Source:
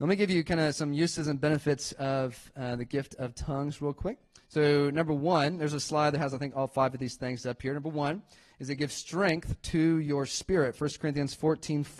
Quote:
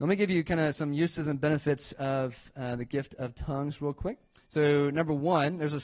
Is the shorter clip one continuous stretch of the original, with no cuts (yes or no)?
yes